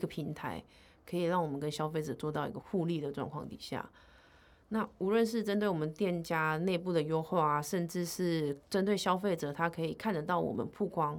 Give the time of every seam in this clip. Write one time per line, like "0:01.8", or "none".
0:02.6